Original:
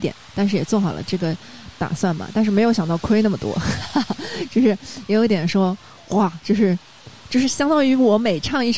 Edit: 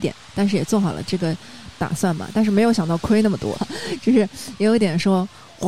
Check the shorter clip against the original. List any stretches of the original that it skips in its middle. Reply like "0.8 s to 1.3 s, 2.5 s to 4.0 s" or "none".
3.5 s to 4.0 s